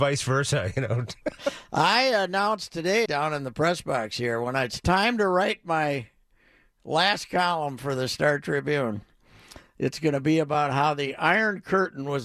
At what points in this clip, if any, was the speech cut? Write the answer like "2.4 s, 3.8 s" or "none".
3.0 s